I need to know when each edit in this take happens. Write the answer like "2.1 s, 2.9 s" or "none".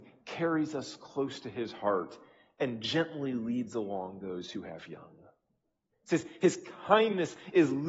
5.9 s